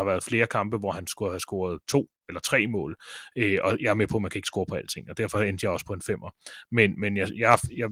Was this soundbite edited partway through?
no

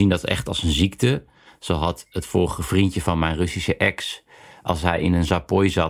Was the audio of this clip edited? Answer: no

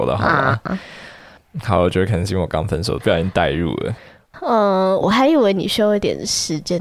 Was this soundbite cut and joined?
yes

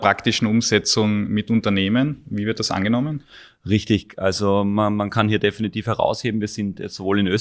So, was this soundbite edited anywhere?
no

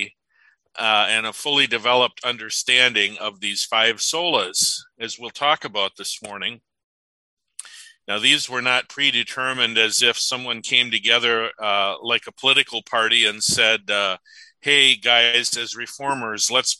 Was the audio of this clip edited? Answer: yes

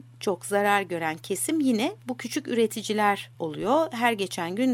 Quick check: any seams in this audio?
yes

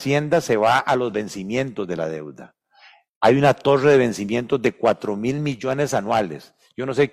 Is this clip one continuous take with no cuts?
yes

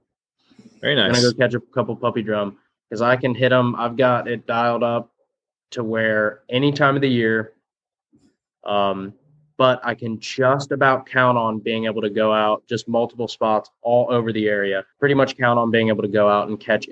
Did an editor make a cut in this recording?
yes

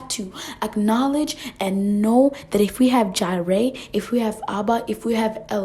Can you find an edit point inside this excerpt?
no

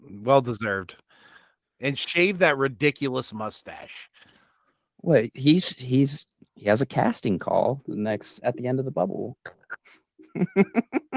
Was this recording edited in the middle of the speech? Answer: yes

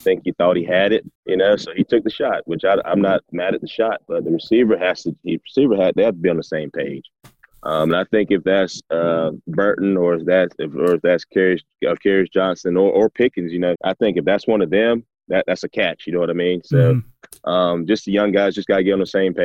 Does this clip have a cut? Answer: yes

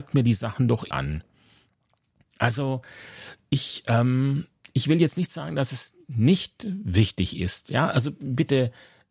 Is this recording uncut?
no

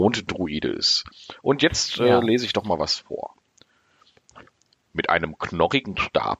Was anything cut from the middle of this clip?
no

